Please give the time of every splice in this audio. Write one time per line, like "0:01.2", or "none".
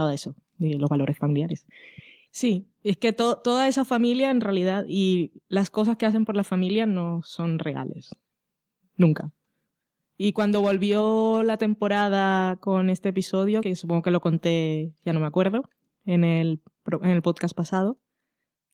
0:02.3
0:13.6